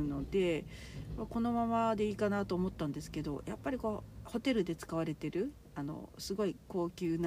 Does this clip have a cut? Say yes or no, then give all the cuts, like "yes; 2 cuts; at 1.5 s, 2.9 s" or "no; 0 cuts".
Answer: yes; 1 cut; at 4.2 s